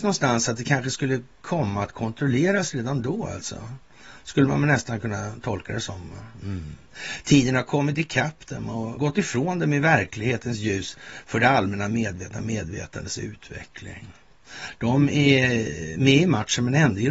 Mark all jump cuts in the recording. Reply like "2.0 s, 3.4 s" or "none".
9.0 s, 14.8 s